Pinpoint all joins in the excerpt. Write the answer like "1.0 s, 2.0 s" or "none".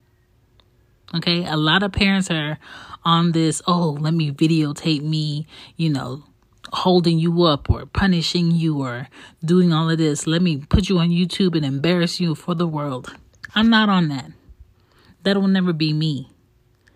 1.1 s